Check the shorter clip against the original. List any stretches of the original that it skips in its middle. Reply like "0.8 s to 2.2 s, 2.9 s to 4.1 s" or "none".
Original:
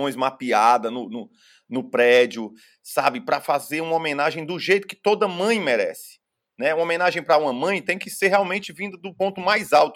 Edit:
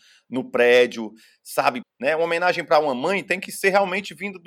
3.2 s to 6.4 s